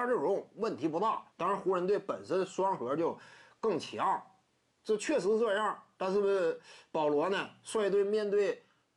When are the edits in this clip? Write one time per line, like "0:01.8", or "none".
0:01.3

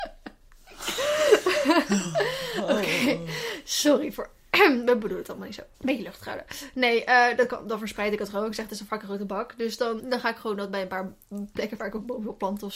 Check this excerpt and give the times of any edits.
0:05.7
0:10.0

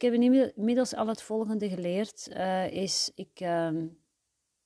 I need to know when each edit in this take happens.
none

